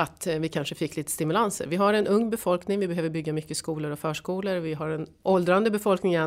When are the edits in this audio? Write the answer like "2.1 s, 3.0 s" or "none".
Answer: none